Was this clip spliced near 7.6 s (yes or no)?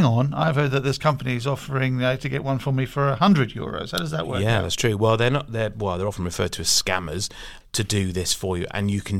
yes